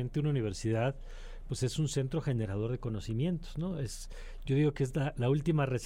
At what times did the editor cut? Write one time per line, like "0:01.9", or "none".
none